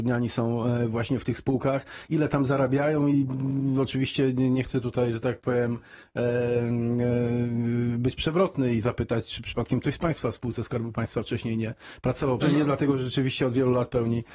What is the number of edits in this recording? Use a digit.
1